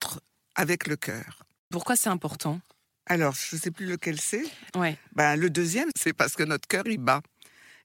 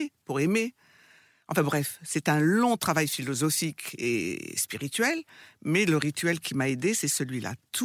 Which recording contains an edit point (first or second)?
first